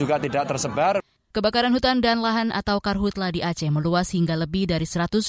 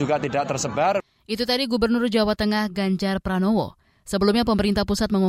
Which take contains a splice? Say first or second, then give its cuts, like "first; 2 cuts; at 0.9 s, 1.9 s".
first; 1 cut; at 1.2 s